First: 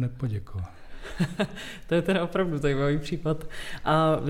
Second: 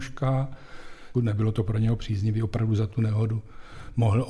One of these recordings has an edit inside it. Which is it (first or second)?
second